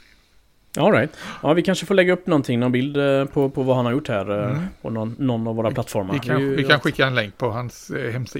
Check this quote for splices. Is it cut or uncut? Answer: uncut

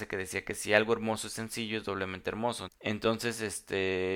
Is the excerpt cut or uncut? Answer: cut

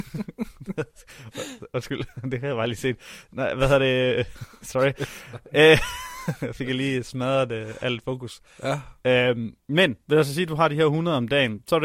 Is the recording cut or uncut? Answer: uncut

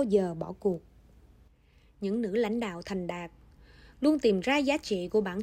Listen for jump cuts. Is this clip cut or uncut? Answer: uncut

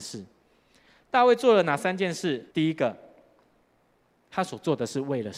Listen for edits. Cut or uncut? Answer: cut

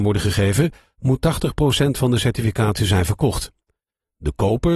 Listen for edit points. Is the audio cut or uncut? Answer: uncut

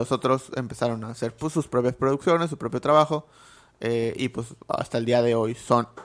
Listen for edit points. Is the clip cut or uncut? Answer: uncut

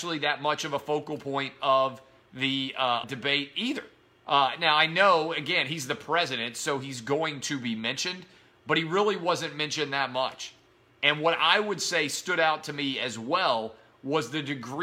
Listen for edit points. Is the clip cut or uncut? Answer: cut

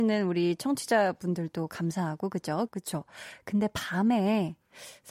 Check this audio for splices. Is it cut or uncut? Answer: cut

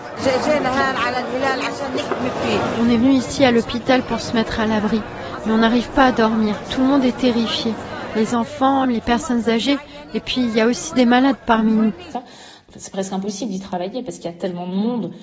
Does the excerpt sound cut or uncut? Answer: cut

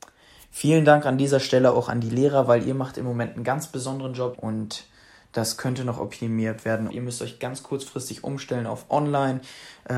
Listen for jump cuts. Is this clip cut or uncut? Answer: cut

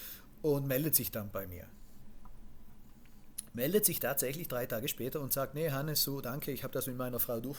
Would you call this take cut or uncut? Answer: uncut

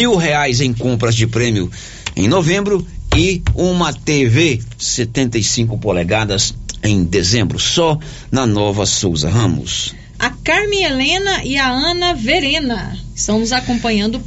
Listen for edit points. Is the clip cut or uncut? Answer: cut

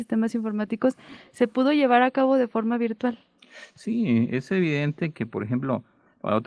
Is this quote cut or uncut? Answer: uncut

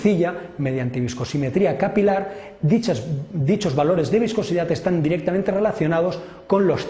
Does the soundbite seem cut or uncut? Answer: uncut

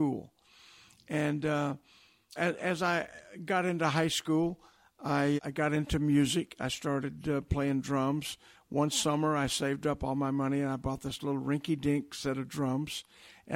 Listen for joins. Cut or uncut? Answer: cut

